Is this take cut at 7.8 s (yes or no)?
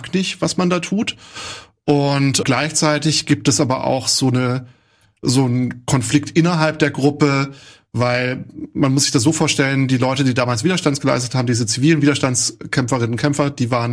no